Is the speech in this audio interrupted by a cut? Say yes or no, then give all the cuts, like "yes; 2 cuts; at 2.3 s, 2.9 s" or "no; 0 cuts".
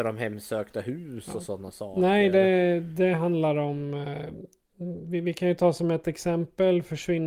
no; 0 cuts